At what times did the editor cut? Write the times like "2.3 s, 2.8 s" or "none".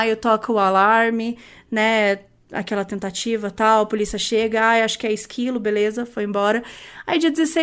none